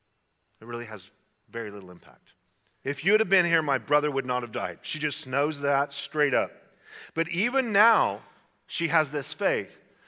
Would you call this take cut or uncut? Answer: cut